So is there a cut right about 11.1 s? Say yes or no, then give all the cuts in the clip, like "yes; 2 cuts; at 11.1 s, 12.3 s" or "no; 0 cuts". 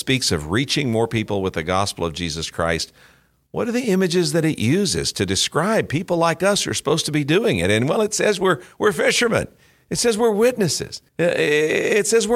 yes; 1 cut; at 11.1 s